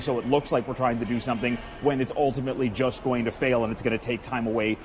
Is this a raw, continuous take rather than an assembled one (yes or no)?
yes